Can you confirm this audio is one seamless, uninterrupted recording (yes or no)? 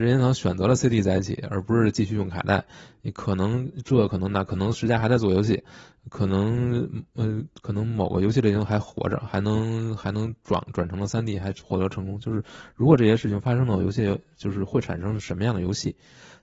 yes